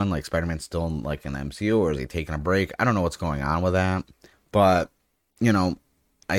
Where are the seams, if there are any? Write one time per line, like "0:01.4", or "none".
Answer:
0:04.3